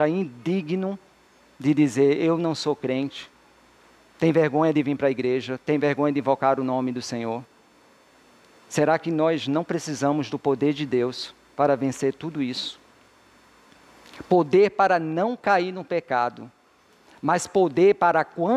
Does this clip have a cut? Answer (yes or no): no